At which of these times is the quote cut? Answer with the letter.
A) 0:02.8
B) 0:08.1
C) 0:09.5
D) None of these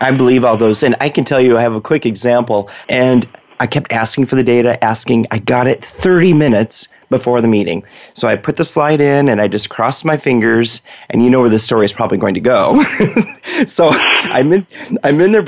A